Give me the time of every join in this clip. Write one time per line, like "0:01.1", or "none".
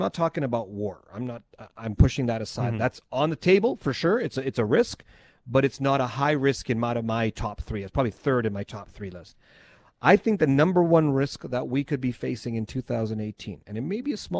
none